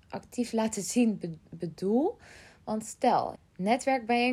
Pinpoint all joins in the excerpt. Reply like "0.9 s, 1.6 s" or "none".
3.4 s